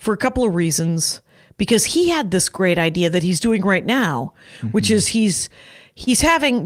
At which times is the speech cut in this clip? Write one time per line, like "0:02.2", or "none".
none